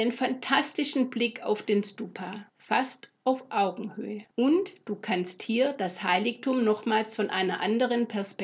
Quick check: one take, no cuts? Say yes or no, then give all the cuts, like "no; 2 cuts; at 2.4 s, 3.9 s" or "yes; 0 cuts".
no; 2 cuts; at 2.5 s, 4.3 s